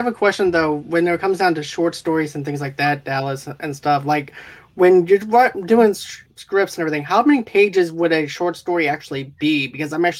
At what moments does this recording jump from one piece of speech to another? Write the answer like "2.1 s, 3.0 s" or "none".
6.2 s